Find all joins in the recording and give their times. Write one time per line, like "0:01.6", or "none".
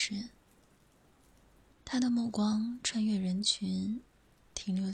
0:01.7